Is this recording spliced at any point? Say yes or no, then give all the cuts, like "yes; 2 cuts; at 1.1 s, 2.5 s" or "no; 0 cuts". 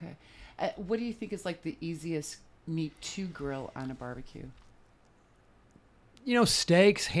no; 0 cuts